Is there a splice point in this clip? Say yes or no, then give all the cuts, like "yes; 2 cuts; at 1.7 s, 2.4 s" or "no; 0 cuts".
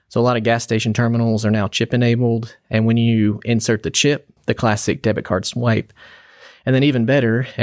yes; 1 cut; at 4.4 s